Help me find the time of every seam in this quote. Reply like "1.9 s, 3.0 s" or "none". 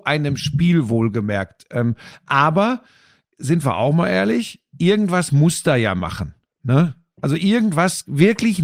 none